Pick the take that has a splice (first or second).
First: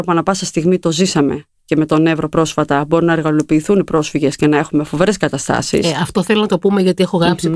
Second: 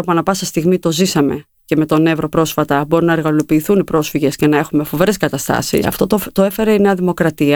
second